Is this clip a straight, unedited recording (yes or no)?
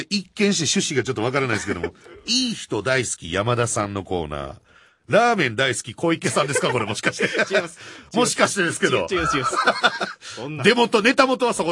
yes